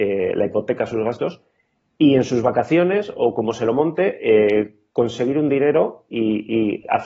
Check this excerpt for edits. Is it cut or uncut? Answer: uncut